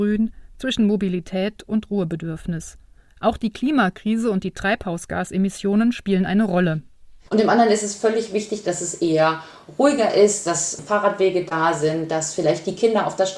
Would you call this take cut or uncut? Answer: cut